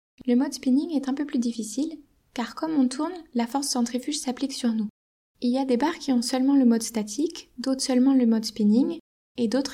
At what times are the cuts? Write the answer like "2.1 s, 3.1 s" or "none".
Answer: 5.3 s

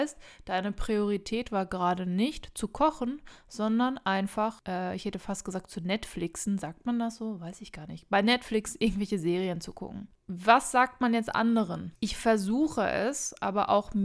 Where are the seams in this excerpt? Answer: none

